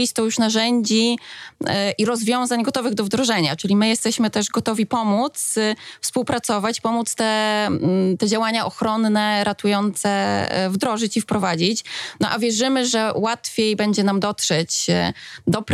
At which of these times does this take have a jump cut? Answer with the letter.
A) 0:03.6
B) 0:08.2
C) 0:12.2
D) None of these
D